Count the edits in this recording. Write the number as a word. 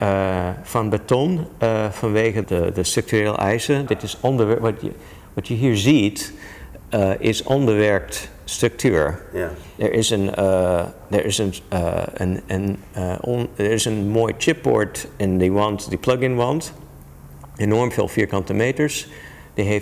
two